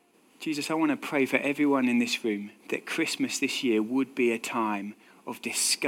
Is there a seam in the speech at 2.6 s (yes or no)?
yes